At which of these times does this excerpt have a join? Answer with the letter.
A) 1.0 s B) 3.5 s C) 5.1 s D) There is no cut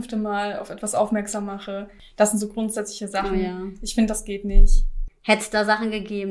C